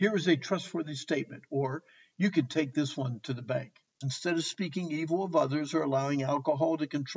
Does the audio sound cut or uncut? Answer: cut